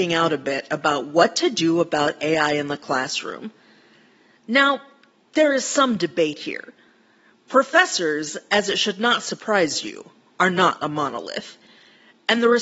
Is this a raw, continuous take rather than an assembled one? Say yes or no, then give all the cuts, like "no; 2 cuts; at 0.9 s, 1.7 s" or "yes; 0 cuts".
yes; 0 cuts